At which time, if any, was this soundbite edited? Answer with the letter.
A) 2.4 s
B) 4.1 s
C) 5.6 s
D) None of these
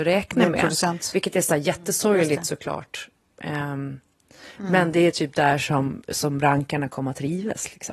D